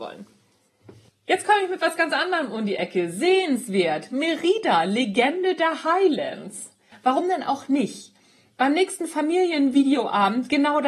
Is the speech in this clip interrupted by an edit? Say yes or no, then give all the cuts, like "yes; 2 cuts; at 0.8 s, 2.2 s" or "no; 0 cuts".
yes; 1 cut; at 6.9 s